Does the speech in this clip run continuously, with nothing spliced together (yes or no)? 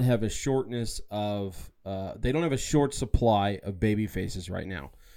yes